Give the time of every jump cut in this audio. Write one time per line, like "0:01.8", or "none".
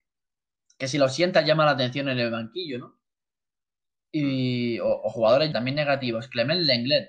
0:05.5